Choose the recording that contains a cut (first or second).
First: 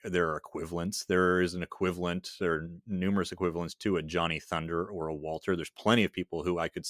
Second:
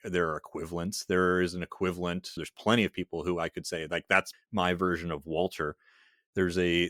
second